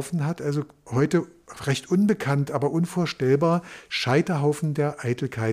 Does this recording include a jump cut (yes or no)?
no